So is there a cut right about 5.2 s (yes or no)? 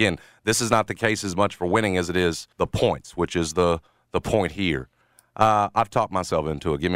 no